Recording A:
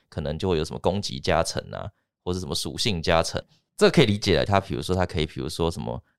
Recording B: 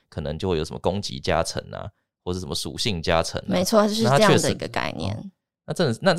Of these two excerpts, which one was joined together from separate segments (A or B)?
A